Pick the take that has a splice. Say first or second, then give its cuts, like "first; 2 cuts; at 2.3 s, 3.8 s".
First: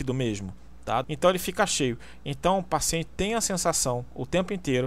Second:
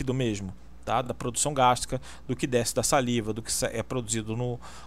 first; 1 cut; at 1.0 s